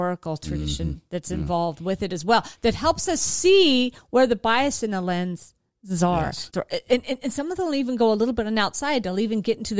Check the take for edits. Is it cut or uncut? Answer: cut